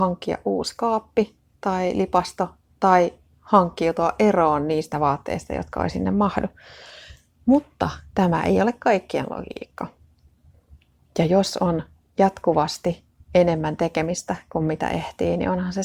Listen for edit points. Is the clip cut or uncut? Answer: uncut